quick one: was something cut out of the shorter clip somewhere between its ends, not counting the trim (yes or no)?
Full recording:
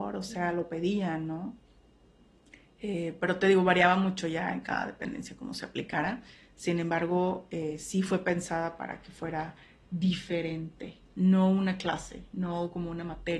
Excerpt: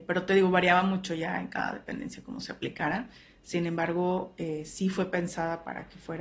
no